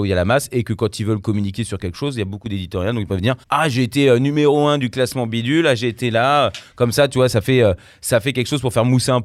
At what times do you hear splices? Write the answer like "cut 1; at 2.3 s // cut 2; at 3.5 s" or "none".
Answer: cut 1; at 3.4 s

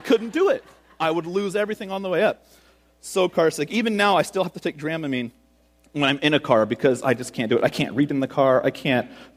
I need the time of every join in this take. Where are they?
none

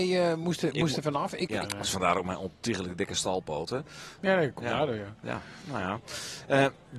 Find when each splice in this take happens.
cut 1; at 1.6 s // cut 2; at 4.2 s

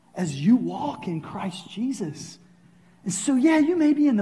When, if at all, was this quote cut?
none

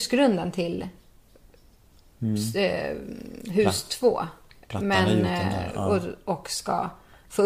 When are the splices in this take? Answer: none

